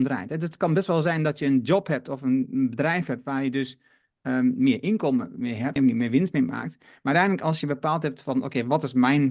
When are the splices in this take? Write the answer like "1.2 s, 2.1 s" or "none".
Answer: 5.8 s